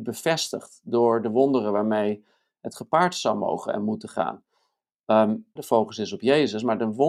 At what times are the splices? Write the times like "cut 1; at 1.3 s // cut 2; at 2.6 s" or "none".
cut 1; at 5.6 s